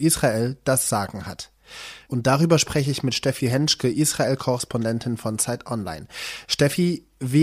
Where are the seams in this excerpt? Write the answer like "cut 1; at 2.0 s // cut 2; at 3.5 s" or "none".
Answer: cut 1; at 2.1 s